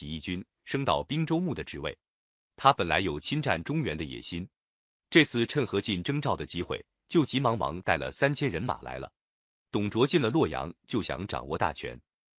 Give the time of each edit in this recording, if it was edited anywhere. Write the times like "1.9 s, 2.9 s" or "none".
7.3 s